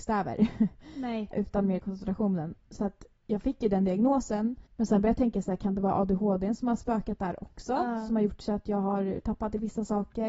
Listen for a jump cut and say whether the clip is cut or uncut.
cut